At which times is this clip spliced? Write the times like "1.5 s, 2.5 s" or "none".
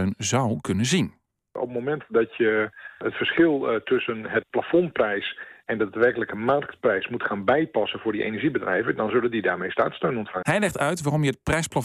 10.4 s